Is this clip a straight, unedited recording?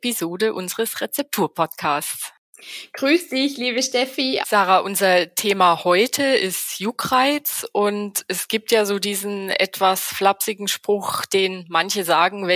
no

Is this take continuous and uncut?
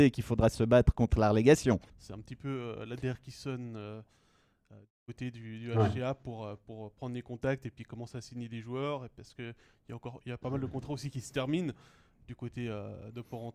no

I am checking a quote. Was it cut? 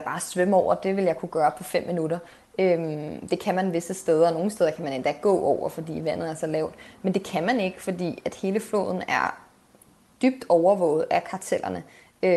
no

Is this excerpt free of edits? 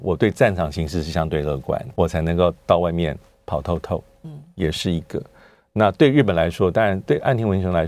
no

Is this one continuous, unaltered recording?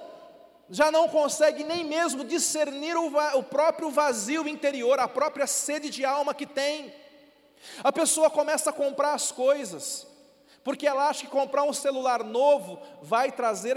yes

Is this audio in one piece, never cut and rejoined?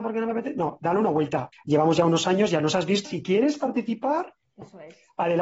no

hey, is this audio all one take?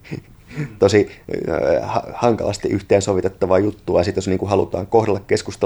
yes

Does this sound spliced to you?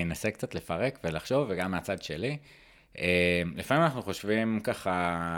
no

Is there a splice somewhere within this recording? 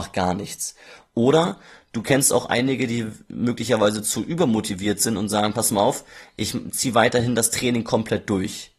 no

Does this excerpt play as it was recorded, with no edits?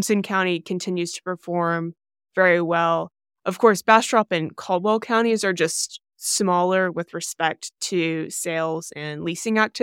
yes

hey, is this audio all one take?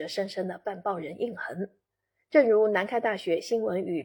yes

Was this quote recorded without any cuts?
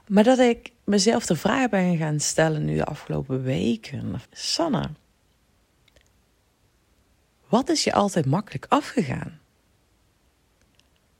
no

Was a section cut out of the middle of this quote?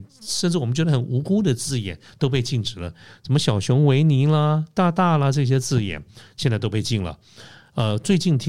no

